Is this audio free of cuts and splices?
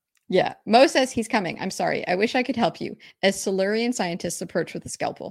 yes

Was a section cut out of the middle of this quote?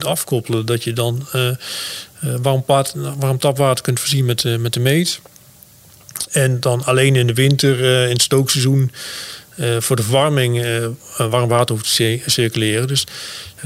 no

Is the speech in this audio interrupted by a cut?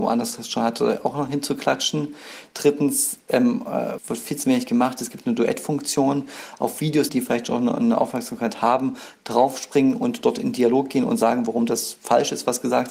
yes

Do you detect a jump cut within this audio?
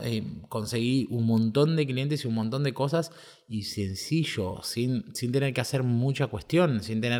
no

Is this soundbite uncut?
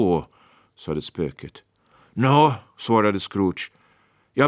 yes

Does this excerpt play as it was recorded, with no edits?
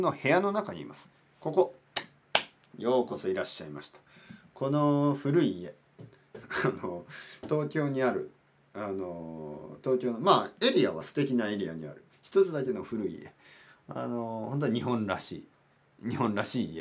no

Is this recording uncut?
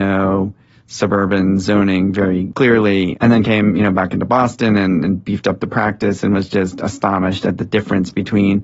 yes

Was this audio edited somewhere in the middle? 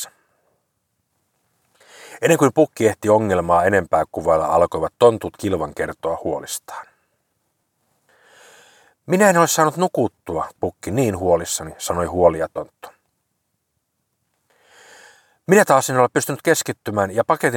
yes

